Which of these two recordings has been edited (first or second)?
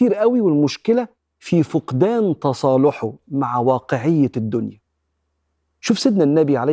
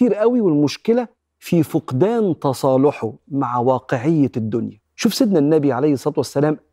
second